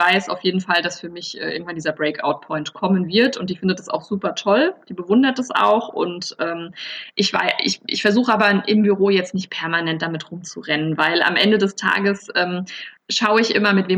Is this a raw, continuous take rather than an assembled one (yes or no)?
no